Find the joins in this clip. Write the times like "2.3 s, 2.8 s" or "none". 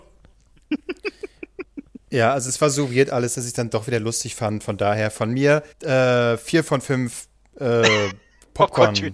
5.7 s